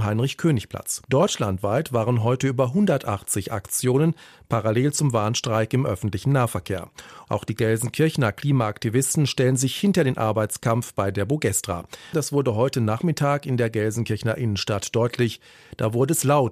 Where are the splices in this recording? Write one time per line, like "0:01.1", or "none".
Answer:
0:01.0
0:07.3
0:12.1